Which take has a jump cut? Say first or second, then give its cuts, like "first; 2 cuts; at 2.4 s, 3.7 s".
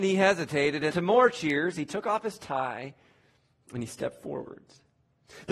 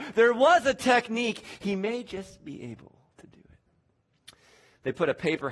first; 1 cut; at 0.9 s